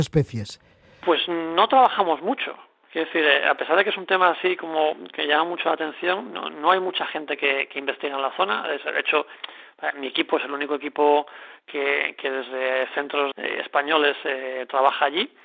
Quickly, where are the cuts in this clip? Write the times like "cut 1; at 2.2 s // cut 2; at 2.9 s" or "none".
cut 1; at 13.3 s